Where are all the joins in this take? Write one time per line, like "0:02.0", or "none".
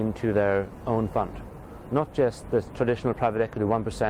none